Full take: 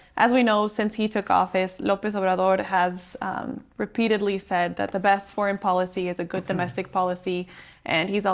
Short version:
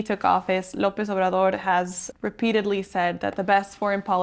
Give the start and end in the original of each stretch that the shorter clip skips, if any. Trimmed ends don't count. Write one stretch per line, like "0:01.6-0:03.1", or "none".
0:03.2-0:03.7